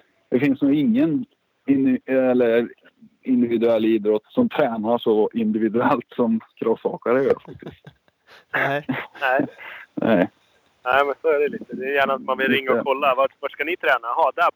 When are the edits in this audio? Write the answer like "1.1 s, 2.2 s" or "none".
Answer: 4.2 s